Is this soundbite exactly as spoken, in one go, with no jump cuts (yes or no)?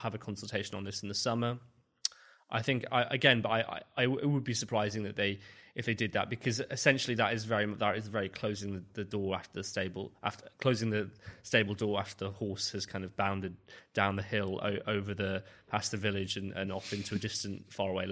yes